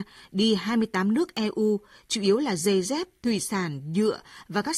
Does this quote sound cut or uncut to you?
uncut